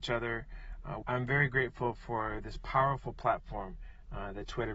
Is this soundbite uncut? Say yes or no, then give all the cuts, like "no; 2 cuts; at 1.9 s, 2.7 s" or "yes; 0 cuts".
no; 1 cut; at 1.0 s